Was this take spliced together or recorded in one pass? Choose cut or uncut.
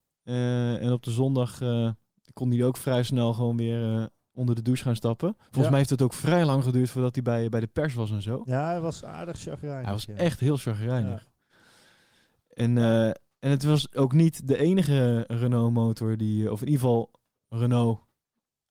uncut